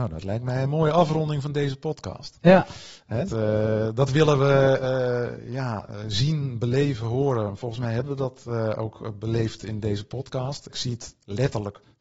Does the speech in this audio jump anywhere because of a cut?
yes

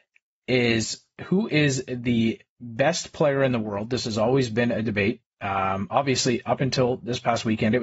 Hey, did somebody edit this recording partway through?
yes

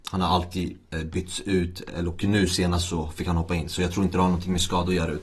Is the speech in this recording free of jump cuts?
yes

